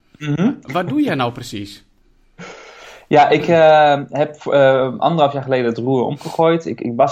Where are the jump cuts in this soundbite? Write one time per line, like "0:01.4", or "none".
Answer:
none